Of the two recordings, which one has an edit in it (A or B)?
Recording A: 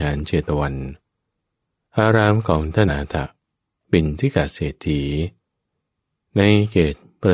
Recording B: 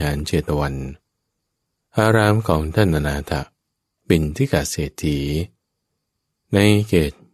A